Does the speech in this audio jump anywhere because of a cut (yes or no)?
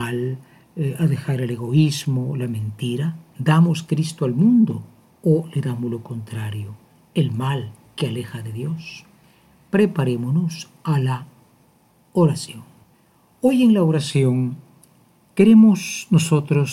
no